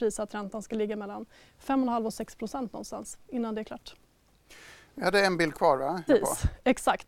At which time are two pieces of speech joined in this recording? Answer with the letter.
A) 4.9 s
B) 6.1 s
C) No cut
B